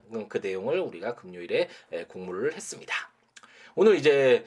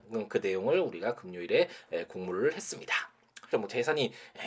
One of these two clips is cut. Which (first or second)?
second